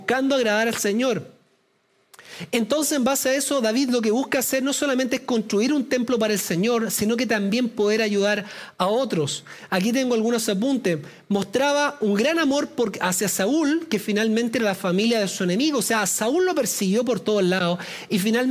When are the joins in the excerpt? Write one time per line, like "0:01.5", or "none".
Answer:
none